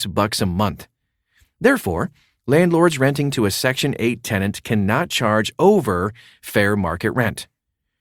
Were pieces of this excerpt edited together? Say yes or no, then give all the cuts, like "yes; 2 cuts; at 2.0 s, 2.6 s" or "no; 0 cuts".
no; 0 cuts